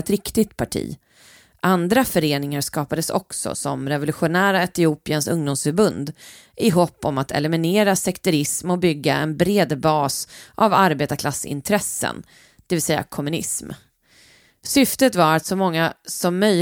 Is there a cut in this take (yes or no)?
no